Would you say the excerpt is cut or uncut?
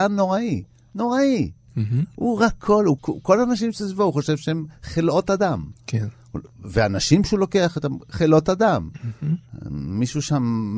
cut